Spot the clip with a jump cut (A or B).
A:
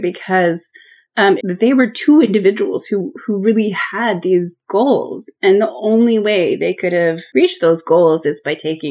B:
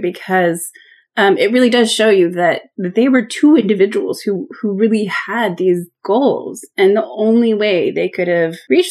A